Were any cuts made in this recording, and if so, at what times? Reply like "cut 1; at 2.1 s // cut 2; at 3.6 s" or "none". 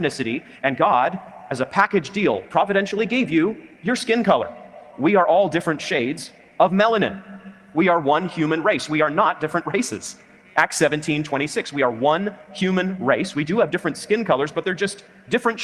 none